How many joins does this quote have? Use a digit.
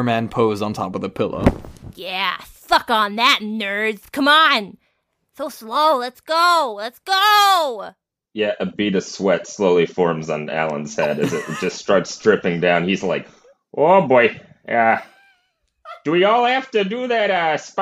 0